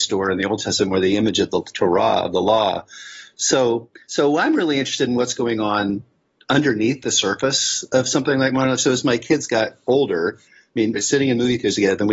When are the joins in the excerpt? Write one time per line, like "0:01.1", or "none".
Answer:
0:11.0